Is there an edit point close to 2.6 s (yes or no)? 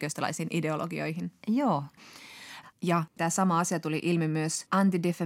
yes